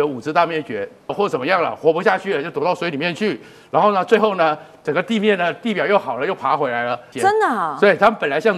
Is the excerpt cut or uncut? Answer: cut